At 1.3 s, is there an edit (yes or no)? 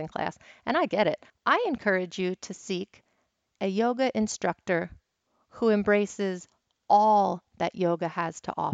yes